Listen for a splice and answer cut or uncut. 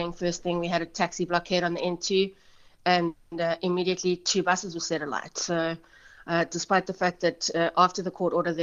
uncut